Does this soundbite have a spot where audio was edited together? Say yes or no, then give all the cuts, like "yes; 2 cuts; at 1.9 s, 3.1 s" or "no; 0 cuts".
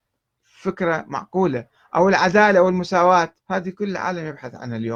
yes; 1 cut; at 3.4 s